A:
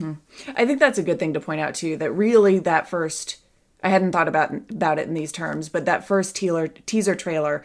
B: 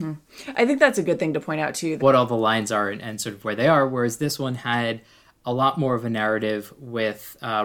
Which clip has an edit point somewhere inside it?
B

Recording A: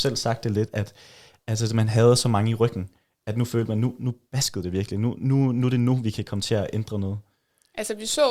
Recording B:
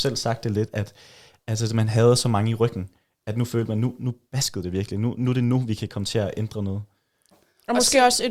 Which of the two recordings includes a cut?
B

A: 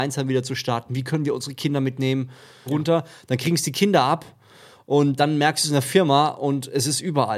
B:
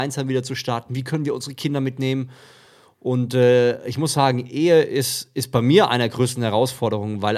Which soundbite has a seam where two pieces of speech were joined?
A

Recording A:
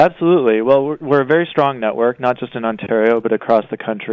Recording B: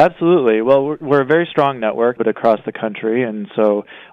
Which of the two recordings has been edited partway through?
B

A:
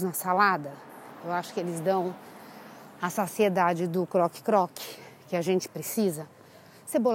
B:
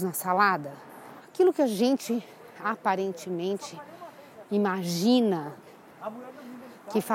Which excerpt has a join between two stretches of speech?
B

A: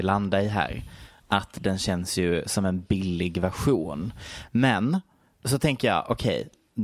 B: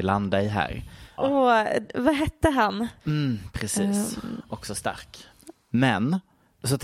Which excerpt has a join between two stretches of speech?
B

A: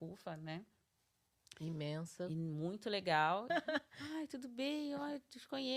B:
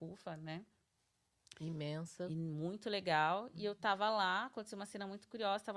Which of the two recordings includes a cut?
A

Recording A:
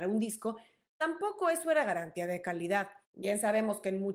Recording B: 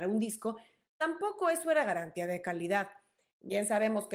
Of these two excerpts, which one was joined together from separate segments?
A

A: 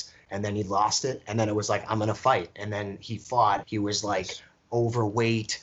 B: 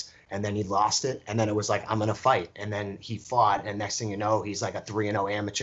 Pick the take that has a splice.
A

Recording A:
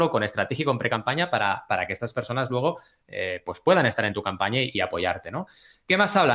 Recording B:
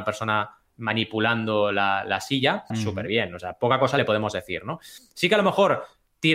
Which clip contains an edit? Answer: B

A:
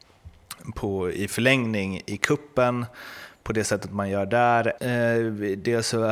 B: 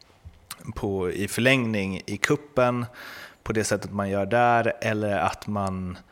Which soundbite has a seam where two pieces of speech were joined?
A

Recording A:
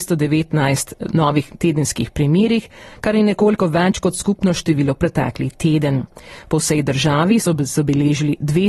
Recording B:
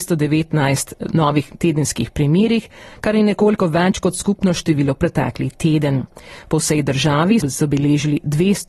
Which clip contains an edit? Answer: B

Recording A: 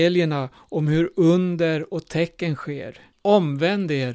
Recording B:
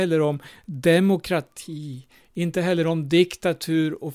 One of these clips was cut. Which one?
A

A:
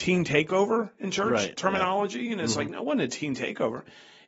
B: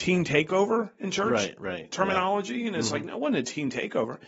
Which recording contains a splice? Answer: A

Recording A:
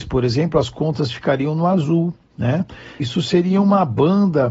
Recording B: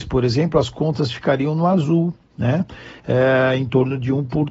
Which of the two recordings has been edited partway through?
A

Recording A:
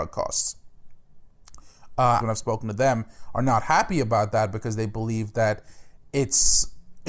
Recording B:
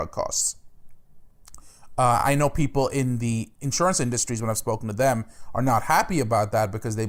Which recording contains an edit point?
A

